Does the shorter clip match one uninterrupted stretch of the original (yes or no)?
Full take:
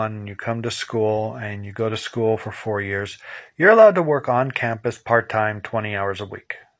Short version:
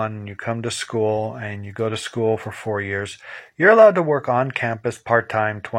yes